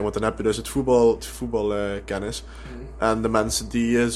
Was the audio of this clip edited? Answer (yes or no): yes